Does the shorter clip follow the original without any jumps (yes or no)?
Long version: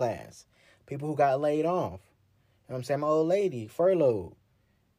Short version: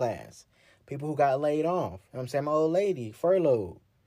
no